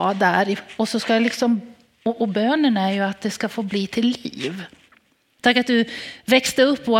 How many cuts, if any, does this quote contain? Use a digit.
1